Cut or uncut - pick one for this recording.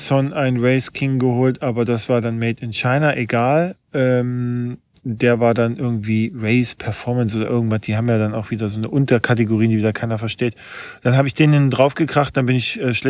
uncut